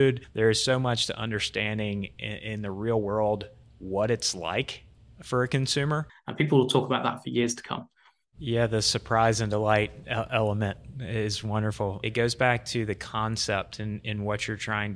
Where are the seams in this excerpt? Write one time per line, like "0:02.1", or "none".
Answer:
0:06.1